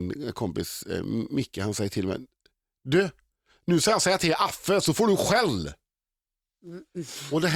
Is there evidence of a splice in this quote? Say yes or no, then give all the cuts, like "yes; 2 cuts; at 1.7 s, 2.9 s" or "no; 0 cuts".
no; 0 cuts